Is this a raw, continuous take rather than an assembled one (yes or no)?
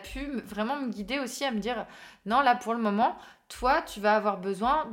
yes